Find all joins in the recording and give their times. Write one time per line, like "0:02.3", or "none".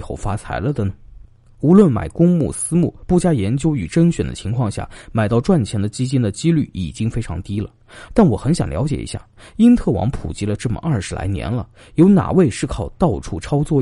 0:08.1